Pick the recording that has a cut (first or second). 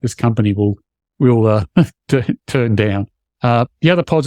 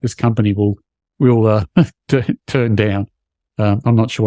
first